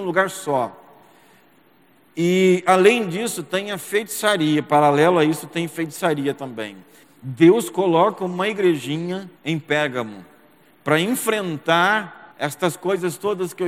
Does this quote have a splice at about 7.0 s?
yes; 3 cuts; at 7.0 s, 9.4 s, 12.3 s

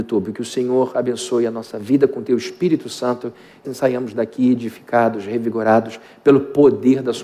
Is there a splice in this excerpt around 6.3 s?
no; 1 cut; at 3.6 s

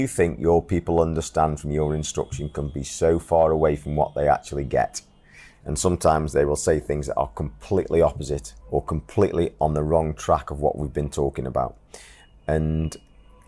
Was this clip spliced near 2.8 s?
no; 2 cuts; at 5.5 s, 8.6 s

